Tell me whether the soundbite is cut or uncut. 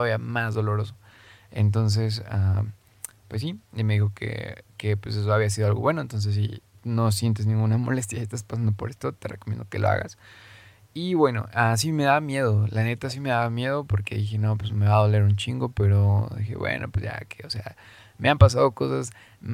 uncut